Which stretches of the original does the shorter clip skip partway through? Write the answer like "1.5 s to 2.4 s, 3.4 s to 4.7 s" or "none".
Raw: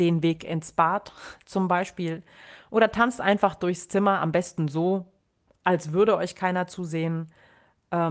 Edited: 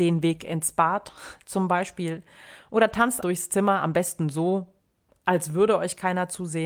3.2 s to 3.6 s